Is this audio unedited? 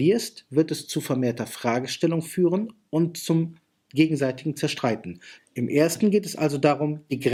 no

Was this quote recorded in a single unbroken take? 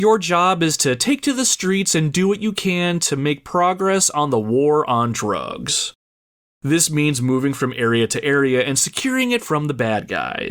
yes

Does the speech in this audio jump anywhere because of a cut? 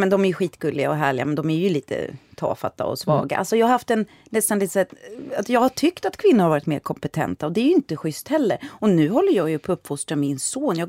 no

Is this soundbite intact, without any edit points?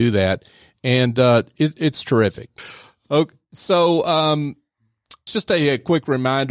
no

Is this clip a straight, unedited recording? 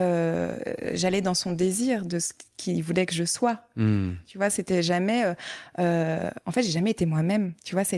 yes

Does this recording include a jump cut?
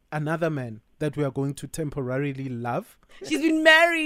yes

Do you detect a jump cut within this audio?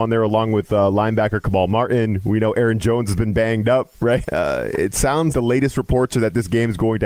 yes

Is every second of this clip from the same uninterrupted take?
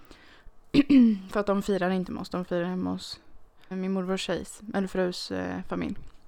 no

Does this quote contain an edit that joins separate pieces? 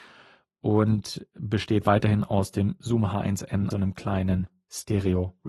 yes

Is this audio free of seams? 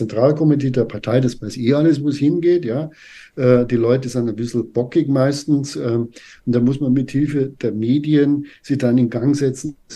yes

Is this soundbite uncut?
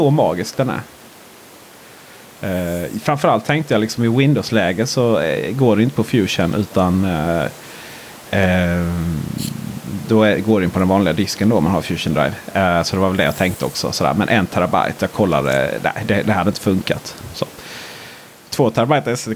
yes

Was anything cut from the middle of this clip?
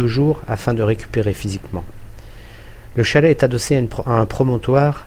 no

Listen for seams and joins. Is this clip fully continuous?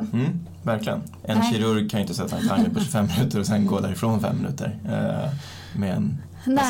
no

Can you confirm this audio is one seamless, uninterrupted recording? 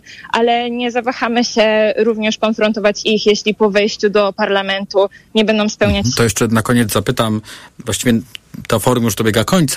no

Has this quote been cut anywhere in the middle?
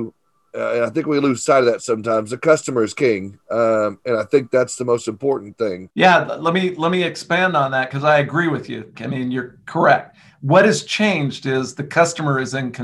yes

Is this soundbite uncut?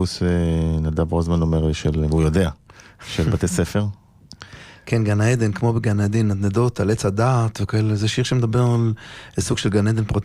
yes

